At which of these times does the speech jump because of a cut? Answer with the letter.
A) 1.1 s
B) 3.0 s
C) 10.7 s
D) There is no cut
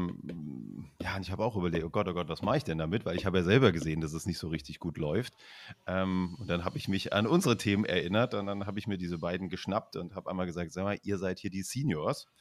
D